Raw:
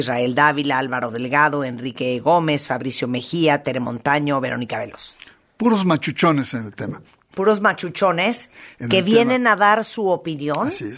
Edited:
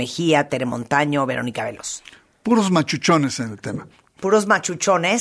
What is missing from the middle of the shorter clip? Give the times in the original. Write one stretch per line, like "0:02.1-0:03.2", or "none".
none